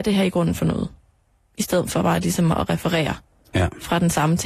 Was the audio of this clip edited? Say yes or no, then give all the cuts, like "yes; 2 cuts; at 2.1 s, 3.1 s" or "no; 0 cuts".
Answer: no; 0 cuts